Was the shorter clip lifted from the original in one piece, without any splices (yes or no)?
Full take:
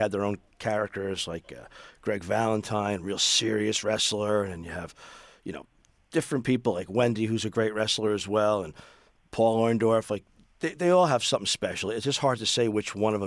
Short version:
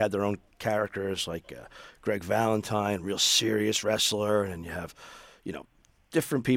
yes